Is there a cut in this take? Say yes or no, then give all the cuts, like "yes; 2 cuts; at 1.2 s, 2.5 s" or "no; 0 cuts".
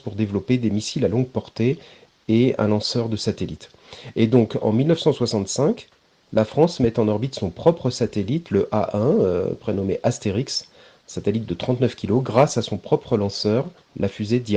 no; 0 cuts